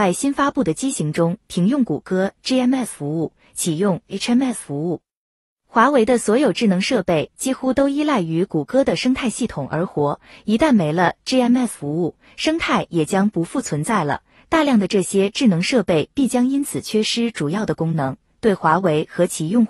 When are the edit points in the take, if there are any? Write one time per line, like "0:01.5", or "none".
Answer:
none